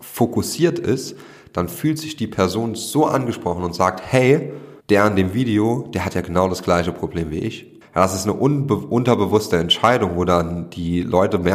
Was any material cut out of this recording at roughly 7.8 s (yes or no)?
yes